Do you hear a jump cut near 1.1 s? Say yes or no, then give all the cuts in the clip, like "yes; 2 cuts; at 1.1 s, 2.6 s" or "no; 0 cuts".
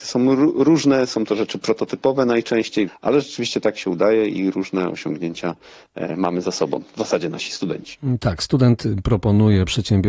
no; 2 cuts; at 2.9 s, 8.2 s